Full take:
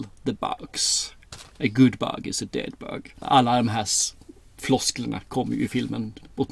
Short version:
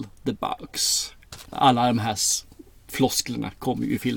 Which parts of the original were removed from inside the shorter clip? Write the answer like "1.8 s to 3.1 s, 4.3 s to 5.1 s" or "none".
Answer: 1.4 s to 3.1 s